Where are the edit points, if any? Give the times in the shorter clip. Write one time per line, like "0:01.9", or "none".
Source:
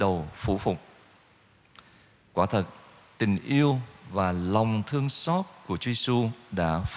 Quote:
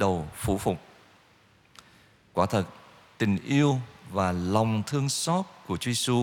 none